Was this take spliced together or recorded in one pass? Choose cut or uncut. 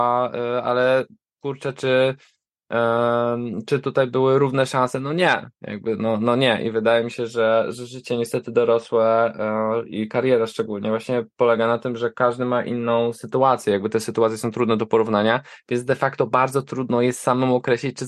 uncut